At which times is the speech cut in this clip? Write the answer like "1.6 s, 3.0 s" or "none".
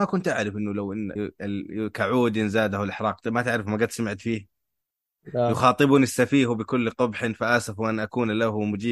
1.2 s